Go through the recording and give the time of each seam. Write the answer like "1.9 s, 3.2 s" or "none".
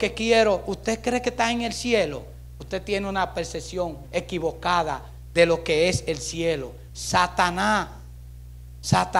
4.0 s, 6.9 s